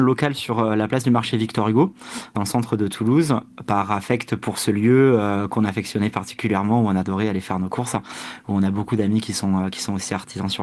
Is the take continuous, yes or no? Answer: yes